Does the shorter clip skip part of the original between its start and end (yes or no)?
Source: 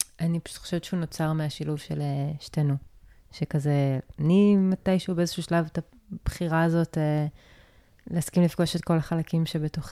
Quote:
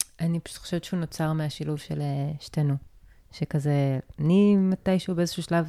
no